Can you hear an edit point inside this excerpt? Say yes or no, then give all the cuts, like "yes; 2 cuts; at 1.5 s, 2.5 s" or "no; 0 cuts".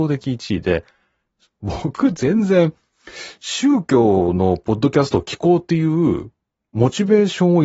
no; 0 cuts